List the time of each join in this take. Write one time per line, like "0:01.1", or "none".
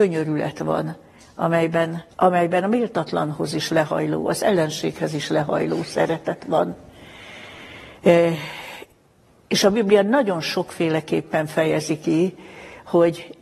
0:02.1